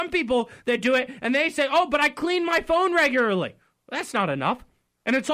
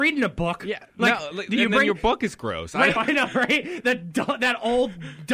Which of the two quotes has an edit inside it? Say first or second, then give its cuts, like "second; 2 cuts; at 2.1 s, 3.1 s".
second; 1 cut; at 3.0 s